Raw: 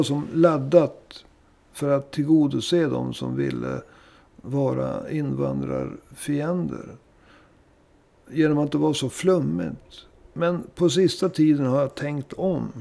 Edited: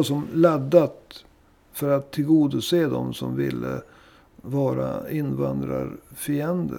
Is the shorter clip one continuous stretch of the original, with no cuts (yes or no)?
yes